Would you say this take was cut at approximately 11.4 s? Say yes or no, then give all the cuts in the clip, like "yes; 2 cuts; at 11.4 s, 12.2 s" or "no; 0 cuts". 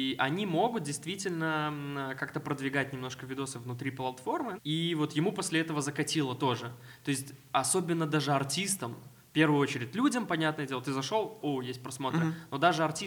yes; 2 cuts; at 4.6 s, 11.4 s